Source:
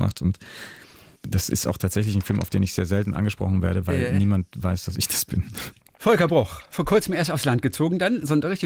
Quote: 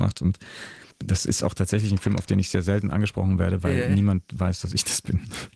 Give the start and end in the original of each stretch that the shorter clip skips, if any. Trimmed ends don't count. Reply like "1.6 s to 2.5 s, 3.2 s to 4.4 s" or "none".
0.9 s to 1.1 s